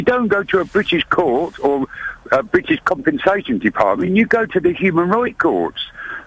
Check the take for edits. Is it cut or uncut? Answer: uncut